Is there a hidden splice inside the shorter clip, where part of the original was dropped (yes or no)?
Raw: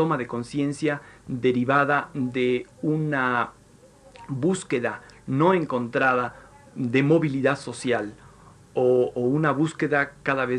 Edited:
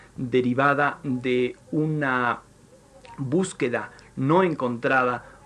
no